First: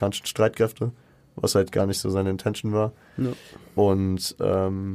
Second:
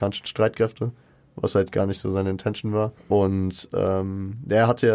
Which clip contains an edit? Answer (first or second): second